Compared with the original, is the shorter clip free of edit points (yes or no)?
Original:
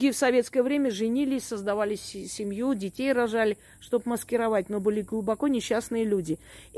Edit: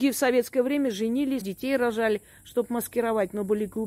no